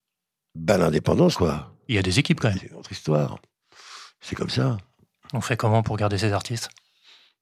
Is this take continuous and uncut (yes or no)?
no